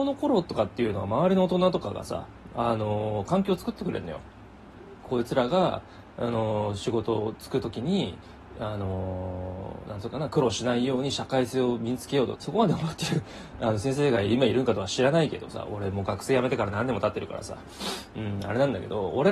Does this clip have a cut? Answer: yes; 1 cut; at 12.4 s

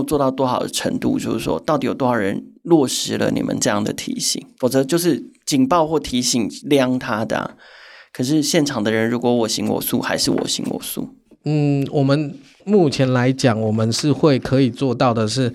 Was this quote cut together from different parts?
no; 0 cuts

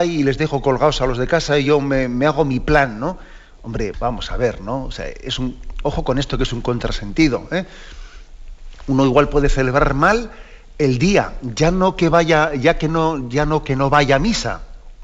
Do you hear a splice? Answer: yes; 1 cut; at 3.9 s

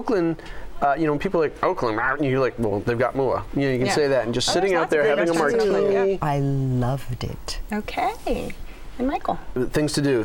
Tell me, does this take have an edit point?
yes; 1 cut; at 6.2 s

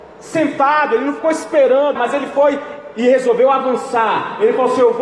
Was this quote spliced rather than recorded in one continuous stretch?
yes; 1 cut; at 2.0 s

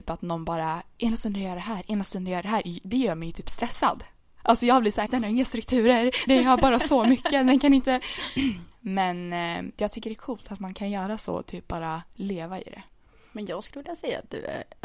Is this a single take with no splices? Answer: no; 3 cuts; at 5.1 s, 6.3 s, 8.4 s

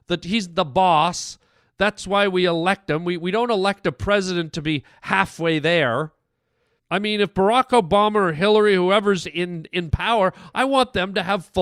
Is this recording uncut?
no; 1 cut; at 6.8 s

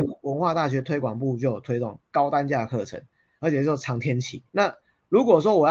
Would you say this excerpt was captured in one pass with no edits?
no; 1 cut; at 4.5 s

